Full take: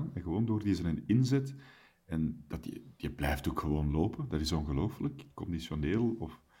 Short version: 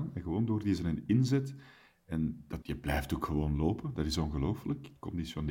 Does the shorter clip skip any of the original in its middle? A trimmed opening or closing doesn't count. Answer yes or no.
yes